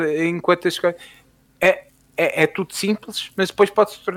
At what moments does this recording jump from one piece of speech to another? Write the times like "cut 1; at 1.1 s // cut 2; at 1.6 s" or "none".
none